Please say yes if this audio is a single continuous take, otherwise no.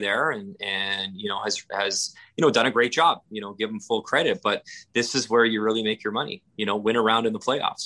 yes